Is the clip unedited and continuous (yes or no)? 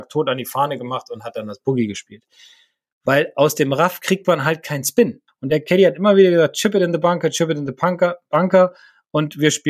no